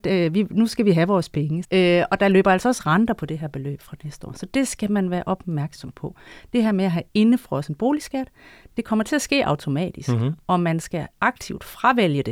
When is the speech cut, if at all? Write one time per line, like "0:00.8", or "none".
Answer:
0:01.6